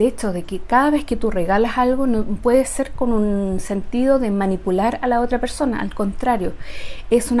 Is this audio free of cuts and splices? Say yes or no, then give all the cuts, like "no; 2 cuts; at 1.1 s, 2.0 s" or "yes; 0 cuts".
yes; 0 cuts